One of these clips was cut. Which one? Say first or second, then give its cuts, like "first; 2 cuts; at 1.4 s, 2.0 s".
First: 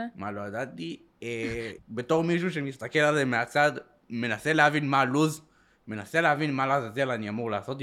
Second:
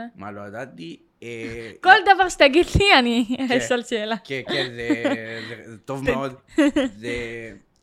first; 1 cut; at 1.8 s